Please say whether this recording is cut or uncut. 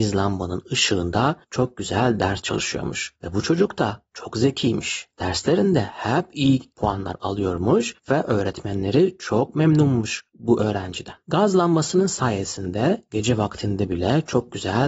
uncut